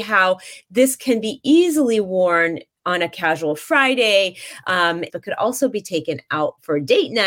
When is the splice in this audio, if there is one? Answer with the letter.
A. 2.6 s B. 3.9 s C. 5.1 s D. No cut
C